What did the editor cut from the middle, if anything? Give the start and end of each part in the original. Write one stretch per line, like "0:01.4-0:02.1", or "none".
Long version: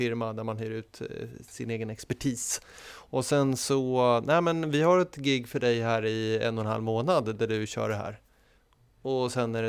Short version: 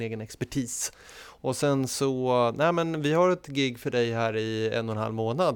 none